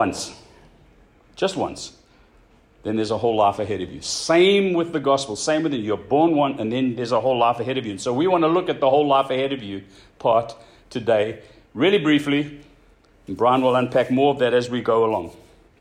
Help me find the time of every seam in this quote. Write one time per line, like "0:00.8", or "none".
none